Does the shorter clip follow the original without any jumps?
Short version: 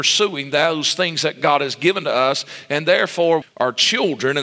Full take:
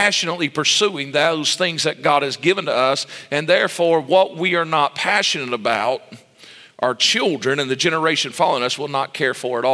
no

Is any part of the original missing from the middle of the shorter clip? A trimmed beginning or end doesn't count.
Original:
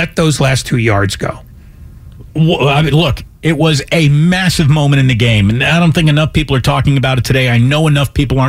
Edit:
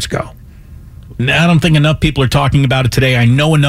yes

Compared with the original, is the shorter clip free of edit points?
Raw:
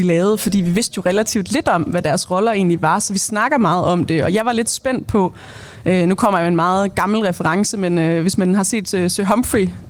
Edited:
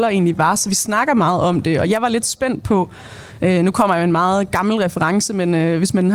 yes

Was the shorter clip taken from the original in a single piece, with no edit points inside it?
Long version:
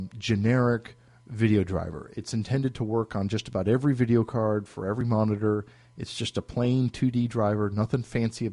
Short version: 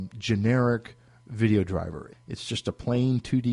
no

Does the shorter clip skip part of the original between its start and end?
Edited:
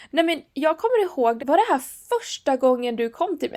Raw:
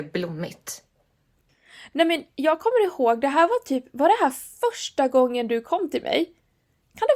yes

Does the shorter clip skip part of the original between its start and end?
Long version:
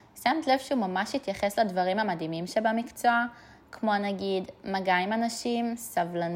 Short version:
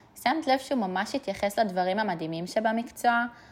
no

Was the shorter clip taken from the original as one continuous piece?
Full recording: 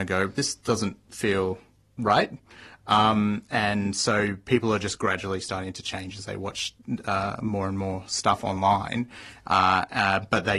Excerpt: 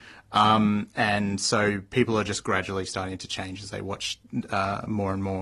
yes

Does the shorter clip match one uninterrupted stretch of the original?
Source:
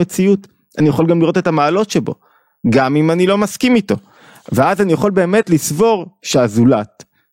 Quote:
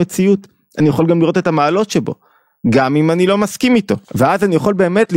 no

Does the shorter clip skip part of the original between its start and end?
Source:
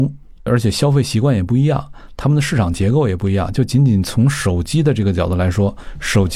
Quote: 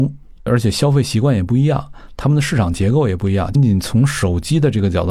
yes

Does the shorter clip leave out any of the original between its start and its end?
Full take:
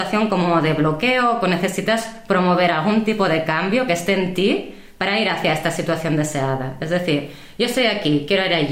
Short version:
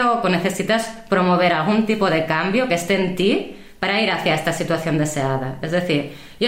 no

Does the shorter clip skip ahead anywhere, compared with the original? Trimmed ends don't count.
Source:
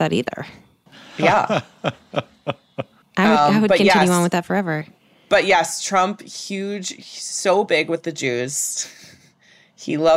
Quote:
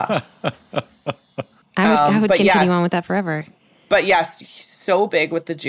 yes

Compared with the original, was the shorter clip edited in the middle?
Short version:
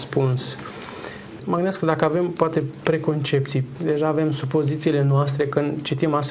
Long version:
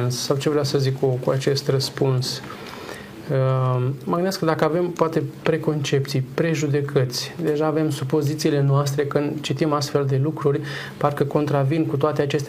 yes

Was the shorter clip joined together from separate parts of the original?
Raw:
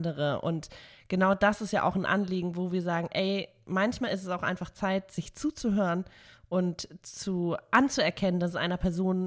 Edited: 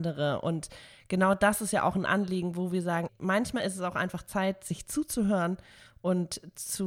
yes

